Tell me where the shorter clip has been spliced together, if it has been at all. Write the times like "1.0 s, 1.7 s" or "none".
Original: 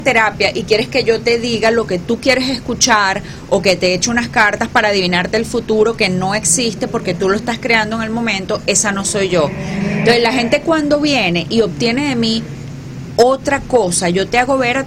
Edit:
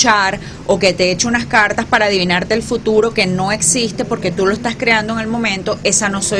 none

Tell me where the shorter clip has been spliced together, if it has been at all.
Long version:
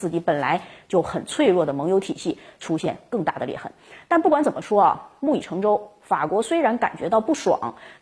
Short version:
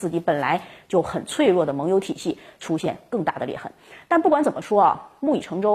none

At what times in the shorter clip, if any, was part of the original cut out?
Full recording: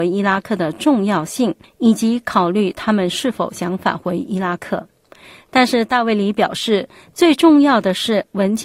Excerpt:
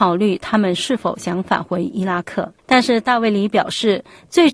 2.6 s

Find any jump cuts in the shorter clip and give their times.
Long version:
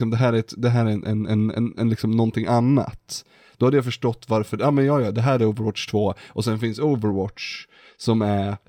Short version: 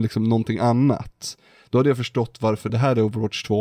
2.7 s

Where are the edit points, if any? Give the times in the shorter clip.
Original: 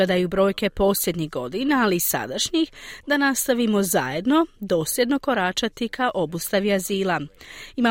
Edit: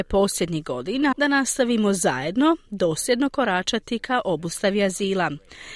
1.1 s

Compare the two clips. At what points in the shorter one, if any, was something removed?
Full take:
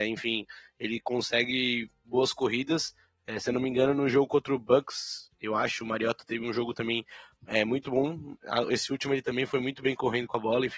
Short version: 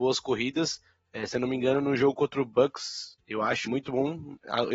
3.7 s

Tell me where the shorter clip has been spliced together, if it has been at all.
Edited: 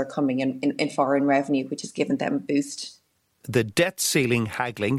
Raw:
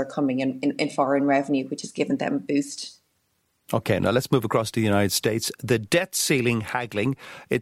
3.4 s

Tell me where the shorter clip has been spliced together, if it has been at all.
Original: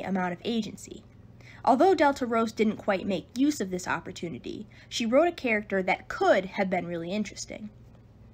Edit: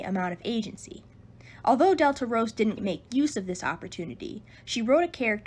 2.8 s

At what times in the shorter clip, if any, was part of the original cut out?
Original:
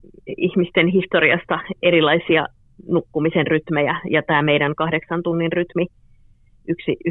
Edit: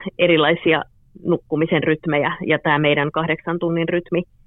none

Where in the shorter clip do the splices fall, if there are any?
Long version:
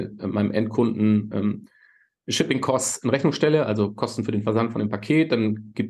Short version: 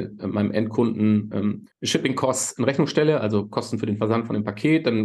1.7 s

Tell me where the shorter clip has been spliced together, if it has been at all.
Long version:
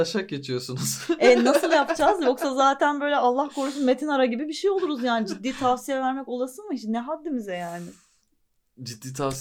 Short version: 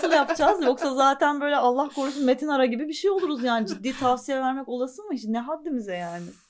none

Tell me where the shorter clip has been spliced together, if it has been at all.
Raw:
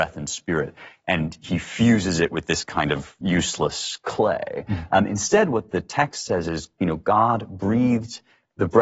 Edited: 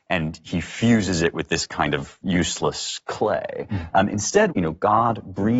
4.5 s

